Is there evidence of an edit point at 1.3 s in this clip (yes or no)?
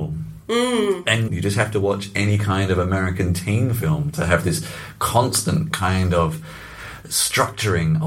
yes